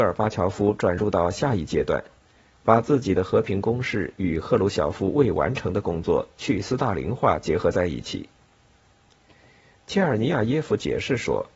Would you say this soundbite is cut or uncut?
uncut